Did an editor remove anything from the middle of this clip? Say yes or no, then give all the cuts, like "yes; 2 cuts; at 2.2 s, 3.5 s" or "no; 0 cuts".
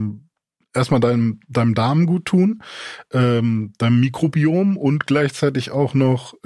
no; 0 cuts